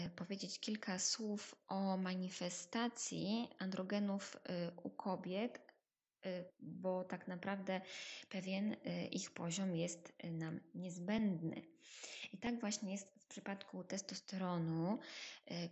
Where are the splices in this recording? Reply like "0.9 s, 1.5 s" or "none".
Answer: 6.5 s